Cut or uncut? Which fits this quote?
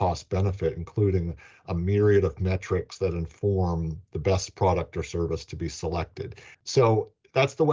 cut